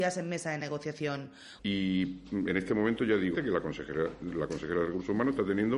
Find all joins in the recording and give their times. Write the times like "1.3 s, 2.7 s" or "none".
1.6 s, 3.3 s